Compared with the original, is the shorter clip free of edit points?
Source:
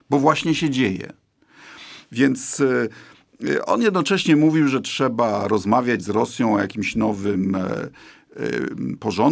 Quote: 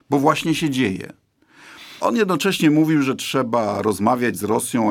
no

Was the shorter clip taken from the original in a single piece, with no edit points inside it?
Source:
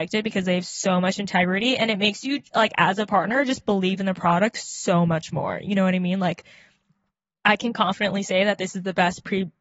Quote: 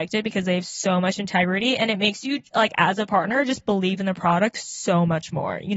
yes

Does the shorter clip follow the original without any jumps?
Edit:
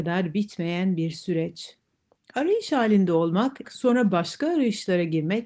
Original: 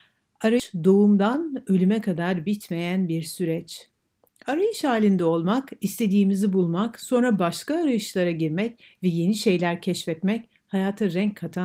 no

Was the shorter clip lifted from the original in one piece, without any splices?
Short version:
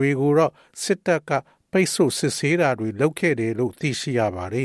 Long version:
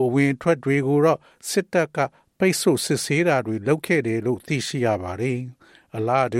yes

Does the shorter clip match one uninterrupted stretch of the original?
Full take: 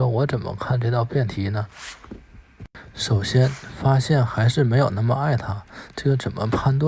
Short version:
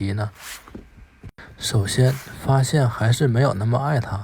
yes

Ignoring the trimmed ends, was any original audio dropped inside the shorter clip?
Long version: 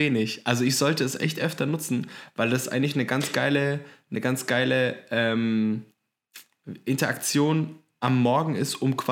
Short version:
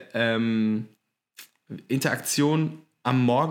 no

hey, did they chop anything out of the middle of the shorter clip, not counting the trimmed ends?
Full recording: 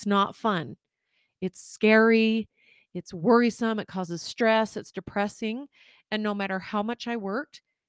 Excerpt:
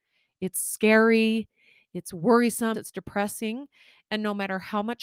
yes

